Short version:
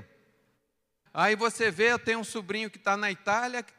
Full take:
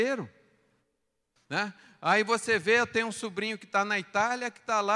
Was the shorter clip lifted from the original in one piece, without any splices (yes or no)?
no